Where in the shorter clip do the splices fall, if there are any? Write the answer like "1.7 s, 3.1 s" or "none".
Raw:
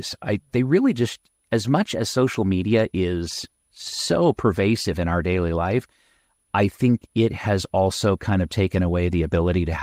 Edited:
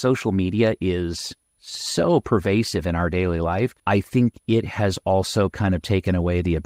3.8 s